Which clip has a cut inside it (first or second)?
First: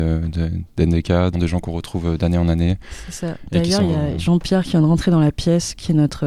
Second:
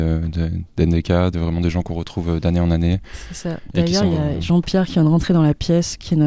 first